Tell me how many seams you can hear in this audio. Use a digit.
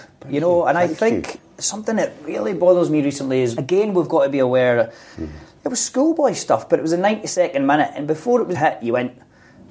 2